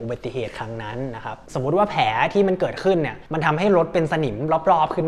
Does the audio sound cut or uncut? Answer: uncut